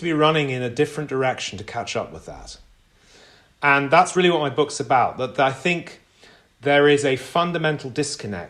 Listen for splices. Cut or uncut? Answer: uncut